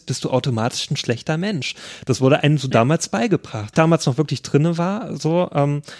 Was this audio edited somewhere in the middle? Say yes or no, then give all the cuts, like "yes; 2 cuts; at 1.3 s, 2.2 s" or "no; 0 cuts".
yes; 1 cut; at 3.7 s